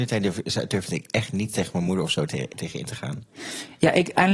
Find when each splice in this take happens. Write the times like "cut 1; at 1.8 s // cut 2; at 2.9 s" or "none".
cut 1; at 2.5 s